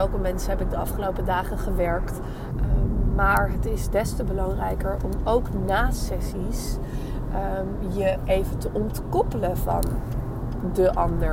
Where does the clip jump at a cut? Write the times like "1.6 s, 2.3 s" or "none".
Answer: 2.5 s

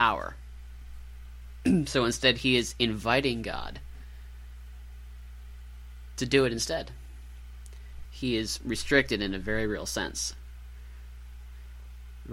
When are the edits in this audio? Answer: 8.0 s

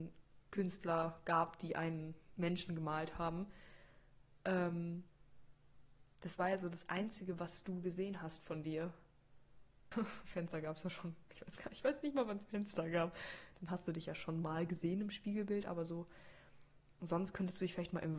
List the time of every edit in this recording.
9.9 s

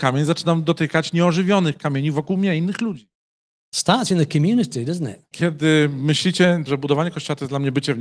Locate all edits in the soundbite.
5.3 s, 6.7 s

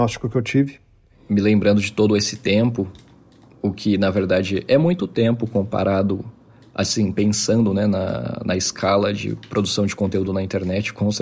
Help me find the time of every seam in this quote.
none

